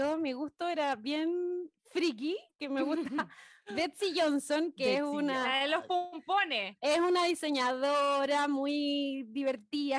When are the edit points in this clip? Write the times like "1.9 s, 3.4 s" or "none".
none